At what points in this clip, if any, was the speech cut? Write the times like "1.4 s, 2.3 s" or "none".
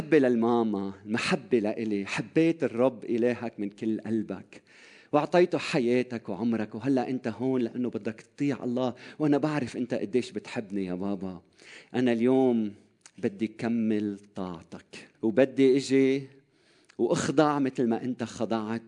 15.1 s